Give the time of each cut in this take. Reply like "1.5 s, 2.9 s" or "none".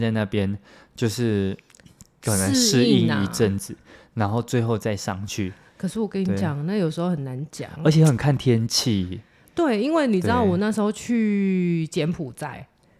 none